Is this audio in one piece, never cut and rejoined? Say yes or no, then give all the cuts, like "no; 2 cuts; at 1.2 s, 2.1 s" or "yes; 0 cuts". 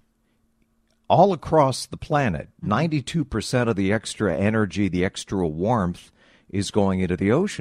yes; 0 cuts